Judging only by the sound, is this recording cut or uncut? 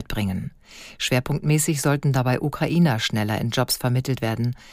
uncut